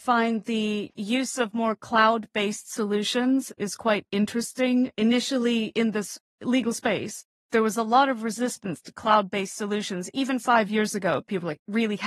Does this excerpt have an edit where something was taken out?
no; 0 cuts

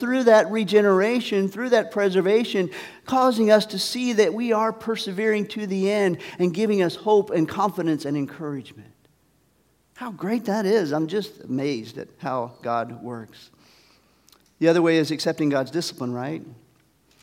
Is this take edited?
no; 0 cuts

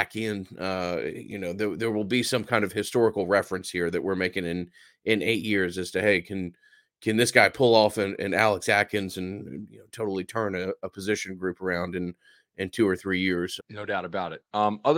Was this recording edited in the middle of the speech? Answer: yes; 1 cut; at 13.6 s

